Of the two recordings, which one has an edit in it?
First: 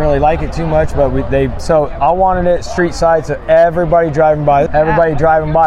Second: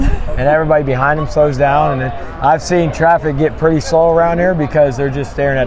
first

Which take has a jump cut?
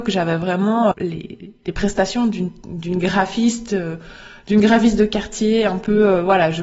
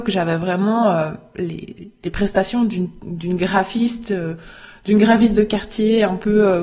first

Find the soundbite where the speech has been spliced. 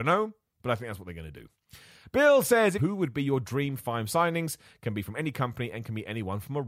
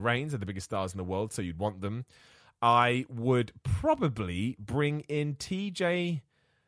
first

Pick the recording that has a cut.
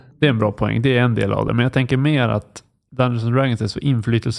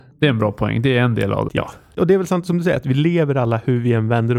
second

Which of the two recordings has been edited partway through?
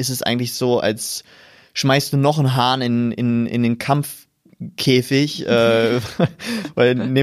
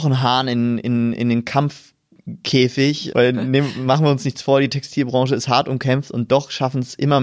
second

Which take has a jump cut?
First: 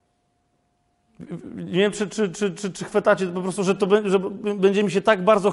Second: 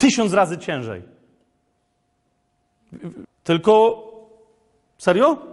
second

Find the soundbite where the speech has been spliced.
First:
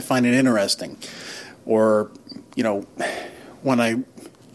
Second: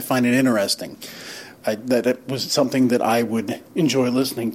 second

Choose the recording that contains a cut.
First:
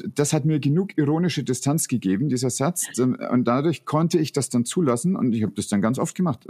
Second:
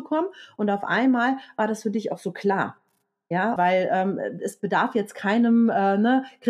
second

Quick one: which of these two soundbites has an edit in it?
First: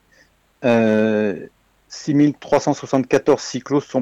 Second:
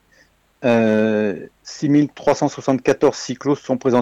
second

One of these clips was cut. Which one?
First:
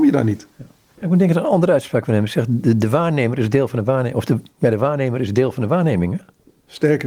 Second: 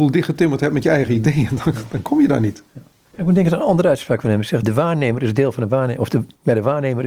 second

